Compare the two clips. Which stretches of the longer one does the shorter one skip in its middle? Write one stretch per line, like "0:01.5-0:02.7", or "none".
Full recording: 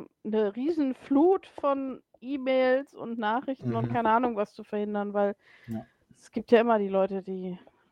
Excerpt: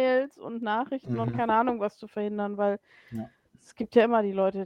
none